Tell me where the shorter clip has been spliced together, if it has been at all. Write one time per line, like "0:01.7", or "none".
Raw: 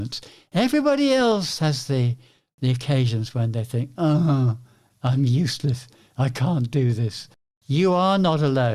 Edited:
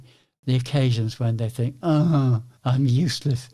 0:02.6